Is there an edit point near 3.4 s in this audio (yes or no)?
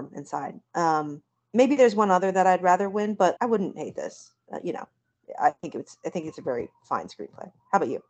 yes